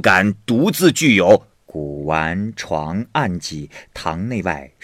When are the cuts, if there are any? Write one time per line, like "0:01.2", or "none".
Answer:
0:01.5